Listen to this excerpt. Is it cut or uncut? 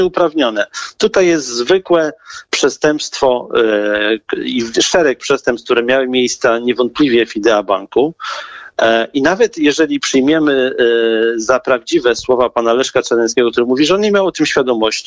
uncut